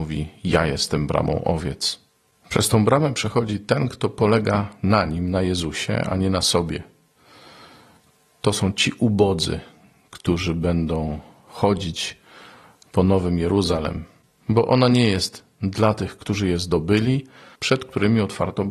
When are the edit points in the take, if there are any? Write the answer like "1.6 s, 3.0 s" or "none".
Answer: 17.5 s